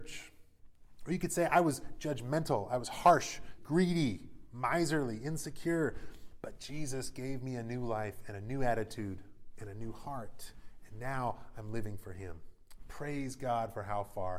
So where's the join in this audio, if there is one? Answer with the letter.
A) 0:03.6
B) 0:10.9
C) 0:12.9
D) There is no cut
A